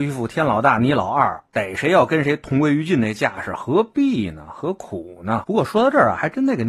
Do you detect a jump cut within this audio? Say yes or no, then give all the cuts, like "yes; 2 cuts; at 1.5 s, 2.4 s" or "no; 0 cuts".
yes; 1 cut; at 5.4 s